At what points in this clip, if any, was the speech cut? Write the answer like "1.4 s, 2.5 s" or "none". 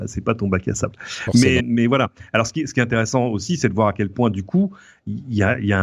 1.6 s